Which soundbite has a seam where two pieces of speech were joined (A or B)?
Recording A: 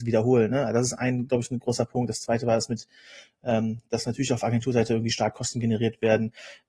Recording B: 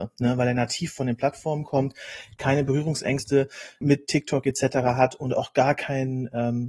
B